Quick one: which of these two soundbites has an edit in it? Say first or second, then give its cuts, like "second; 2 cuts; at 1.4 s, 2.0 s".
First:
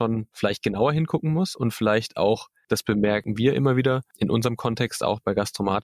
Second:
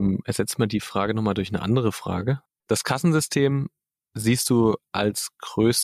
second; 1 cut; at 2.6 s